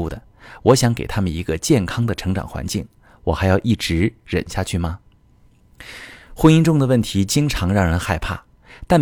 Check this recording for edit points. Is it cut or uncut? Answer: uncut